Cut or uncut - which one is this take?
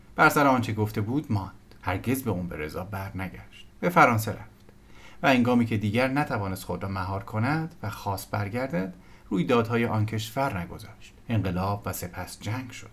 cut